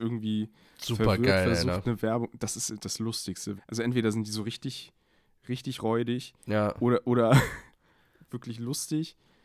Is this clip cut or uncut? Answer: cut